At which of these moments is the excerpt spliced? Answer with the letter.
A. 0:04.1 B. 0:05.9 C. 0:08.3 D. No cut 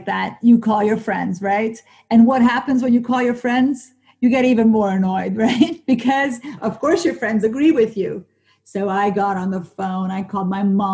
D